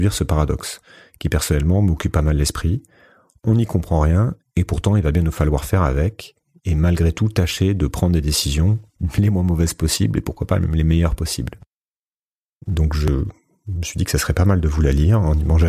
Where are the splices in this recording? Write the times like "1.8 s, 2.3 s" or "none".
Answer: 12.6 s

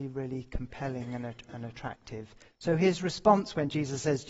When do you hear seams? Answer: none

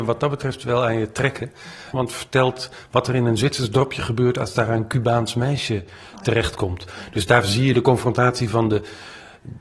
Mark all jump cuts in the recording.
1.9 s

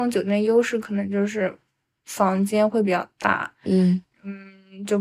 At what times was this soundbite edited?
none

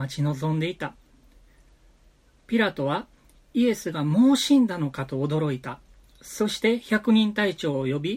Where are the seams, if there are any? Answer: none

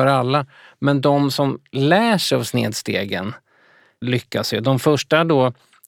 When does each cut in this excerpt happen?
4.0 s

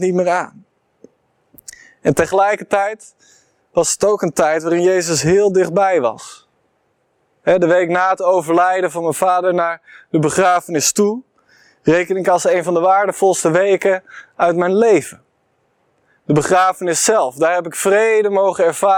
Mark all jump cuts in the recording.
none

